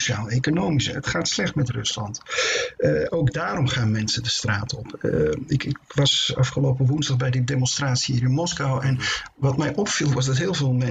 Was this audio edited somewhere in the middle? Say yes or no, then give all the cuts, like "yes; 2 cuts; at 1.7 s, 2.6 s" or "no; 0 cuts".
no; 0 cuts